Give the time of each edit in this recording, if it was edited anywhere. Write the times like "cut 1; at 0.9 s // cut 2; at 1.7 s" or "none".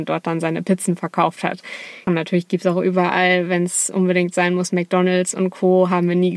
cut 1; at 2.1 s